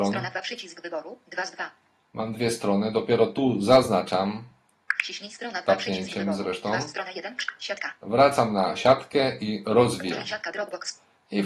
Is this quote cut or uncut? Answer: uncut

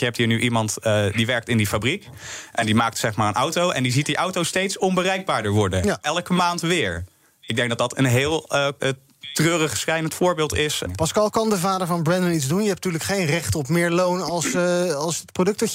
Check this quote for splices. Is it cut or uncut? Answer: cut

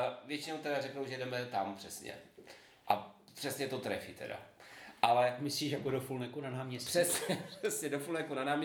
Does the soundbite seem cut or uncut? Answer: uncut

